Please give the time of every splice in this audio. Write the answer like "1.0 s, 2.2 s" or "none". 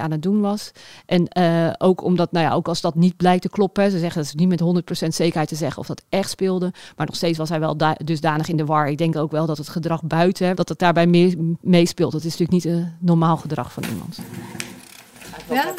10.5 s